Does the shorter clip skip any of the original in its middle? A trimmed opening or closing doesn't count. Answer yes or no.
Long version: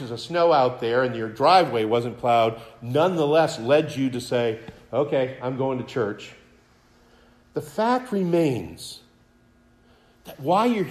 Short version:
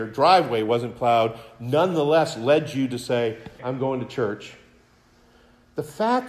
yes